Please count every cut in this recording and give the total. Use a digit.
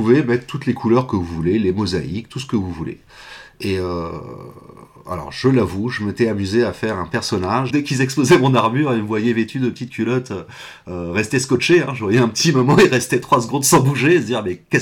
1